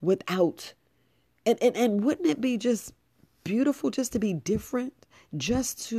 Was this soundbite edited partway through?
no; 0 cuts

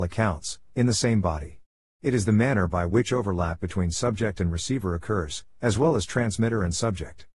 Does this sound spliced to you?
yes; 1 cut; at 1.9 s

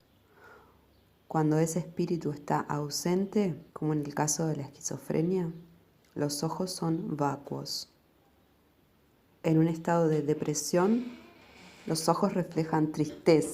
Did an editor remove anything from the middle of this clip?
yes; 1 cut; at 3.7 s

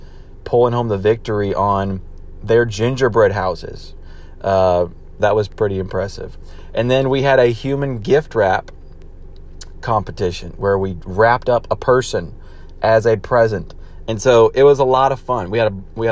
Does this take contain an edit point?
yes; 1 cut; at 5.2 s

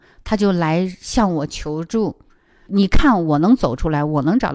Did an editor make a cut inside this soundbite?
yes; 1 cut; at 2.7 s

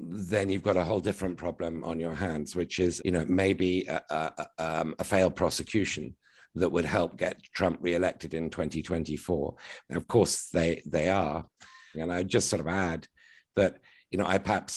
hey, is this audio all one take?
no; 3 cuts; at 3.0 s, 9.9 s, 11.9 s

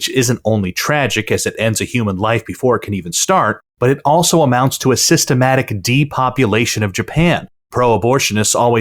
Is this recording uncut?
yes; 0 cuts

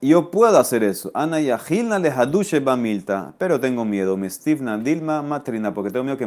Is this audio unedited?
yes; 0 cuts

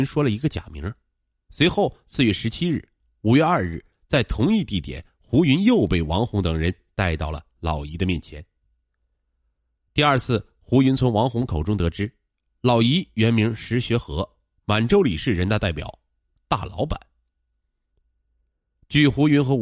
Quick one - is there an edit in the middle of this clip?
no; 0 cuts

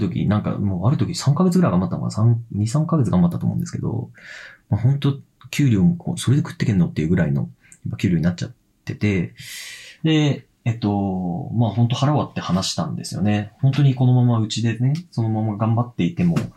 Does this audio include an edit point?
no; 0 cuts

